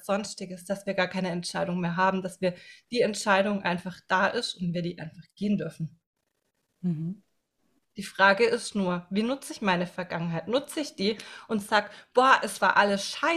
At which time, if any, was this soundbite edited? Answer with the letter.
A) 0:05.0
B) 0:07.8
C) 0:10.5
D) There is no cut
B